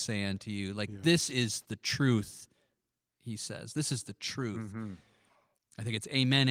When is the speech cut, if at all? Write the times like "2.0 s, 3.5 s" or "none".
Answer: none